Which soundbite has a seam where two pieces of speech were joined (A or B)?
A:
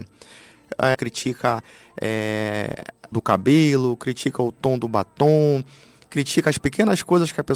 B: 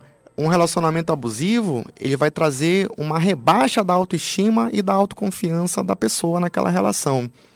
A